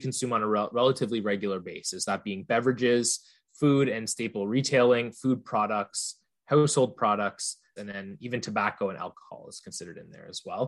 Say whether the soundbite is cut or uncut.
cut